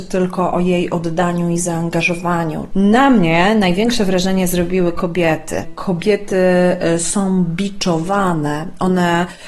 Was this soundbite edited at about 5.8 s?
no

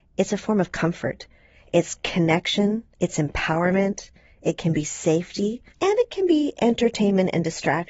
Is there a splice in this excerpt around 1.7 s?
no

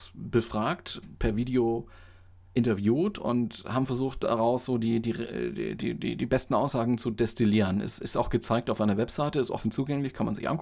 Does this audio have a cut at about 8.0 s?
no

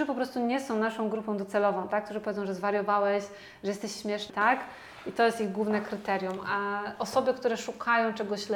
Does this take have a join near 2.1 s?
no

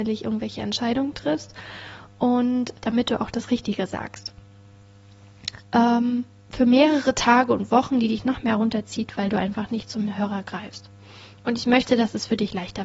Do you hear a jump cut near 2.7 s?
yes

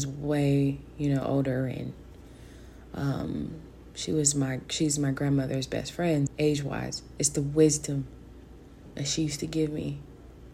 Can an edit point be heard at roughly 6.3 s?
yes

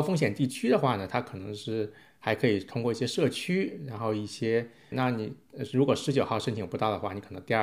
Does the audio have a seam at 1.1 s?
no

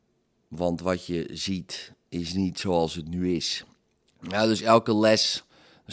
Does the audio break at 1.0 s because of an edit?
no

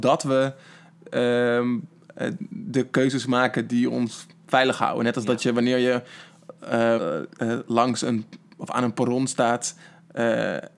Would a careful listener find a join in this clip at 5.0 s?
no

